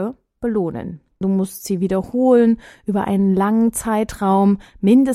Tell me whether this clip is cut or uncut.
cut